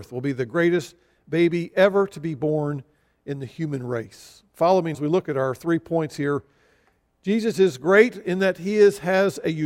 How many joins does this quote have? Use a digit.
1